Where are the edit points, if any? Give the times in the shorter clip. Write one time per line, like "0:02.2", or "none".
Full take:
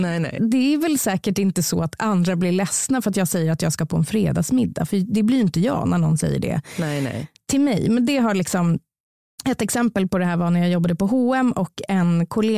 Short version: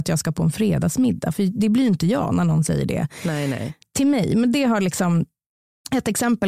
none